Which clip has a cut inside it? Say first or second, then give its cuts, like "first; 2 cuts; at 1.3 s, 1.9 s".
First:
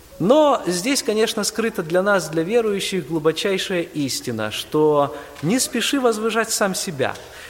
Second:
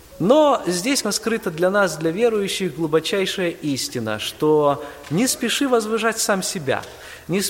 second; 1 cut; at 1.0 s